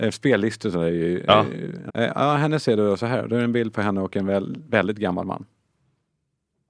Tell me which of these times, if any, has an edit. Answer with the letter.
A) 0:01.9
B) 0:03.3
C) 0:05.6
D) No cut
A